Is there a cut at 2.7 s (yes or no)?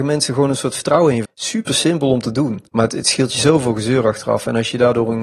yes